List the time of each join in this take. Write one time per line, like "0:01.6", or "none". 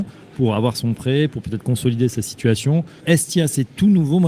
0:03.0